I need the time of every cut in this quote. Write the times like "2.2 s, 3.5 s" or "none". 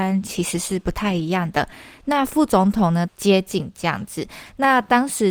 2.0 s, 3.1 s

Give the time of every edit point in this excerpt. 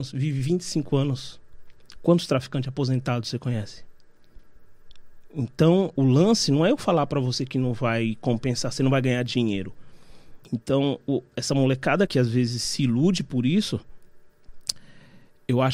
6.0 s, 10.4 s, 12.1 s

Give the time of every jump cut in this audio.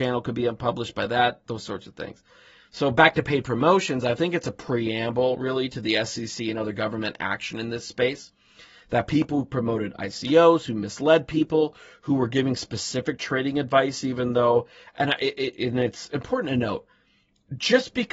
none

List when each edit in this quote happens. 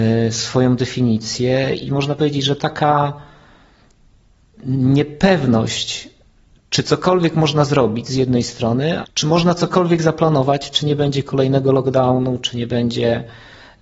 9.0 s

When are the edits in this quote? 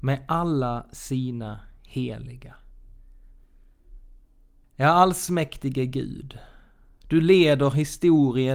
4.6 s

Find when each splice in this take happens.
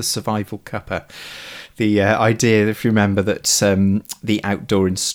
none

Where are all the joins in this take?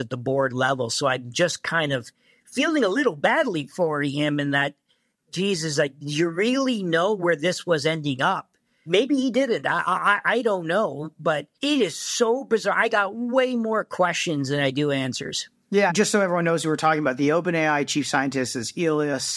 11.5 s, 15.9 s

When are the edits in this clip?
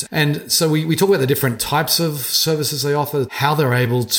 3.3 s

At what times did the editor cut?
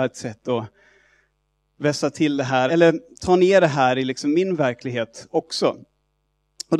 2.7 s

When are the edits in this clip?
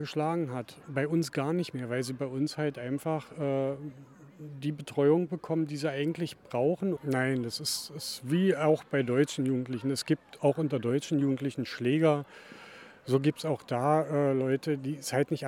7.0 s

